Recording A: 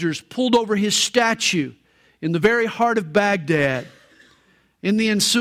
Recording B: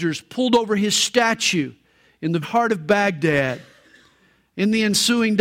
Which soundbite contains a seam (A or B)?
B